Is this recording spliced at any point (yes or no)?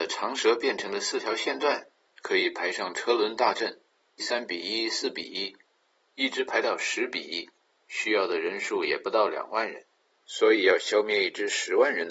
yes